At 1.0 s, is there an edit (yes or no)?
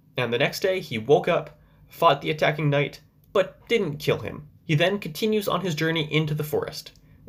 no